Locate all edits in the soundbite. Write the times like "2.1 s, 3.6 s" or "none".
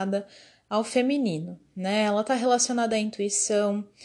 none